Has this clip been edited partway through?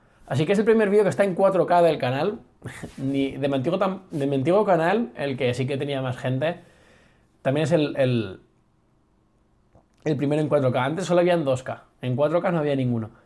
no; 0 cuts

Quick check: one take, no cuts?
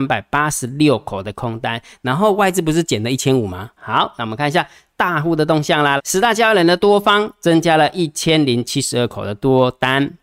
no; 2 cuts; at 3.8 s, 6.0 s

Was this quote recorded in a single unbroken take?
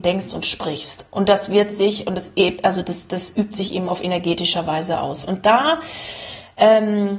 yes; 0 cuts

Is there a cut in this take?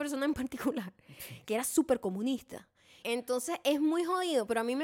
yes; 1 cut; at 3.0 s

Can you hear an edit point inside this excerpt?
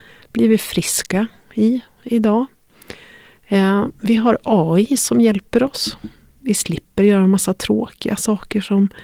no; 0 cuts

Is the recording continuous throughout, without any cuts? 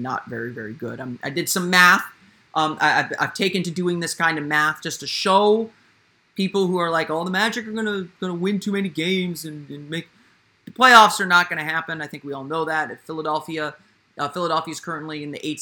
yes; 0 cuts

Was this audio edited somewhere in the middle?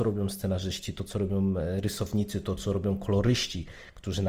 no; 0 cuts

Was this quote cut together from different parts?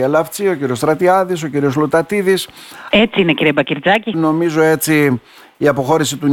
yes; 2 cuts; at 2.9 s, 4.1 s

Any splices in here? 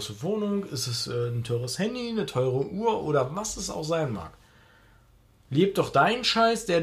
no; 0 cuts

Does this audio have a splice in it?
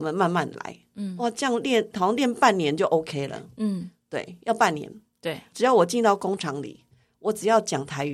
yes; 1 cut; at 5.5 s

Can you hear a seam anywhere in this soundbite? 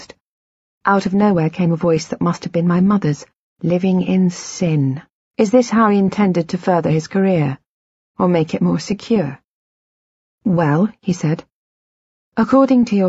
yes; 2 cuts; at 5.2 s, 10.3 s

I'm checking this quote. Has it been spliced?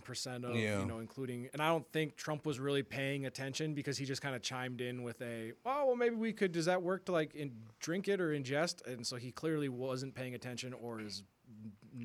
no; 0 cuts

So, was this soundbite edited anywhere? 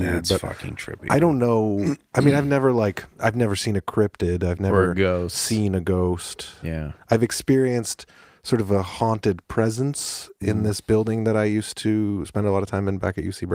no; 0 cuts

